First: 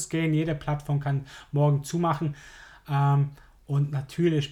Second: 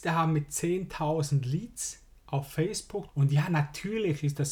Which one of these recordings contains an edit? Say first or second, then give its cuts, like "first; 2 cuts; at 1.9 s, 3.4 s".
second; 1 cut; at 3.1 s